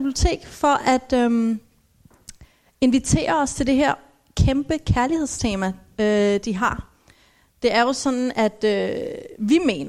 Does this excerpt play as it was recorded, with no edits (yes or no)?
yes